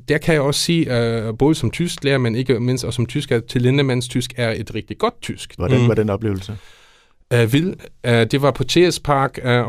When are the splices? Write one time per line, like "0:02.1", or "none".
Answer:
0:05.6